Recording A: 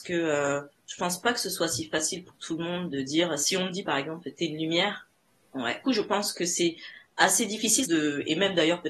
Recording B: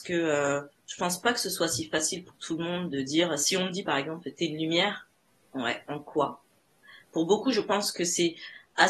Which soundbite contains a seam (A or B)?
A